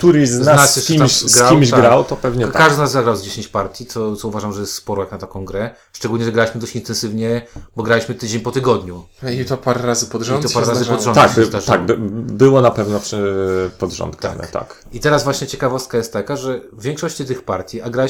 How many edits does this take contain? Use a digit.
0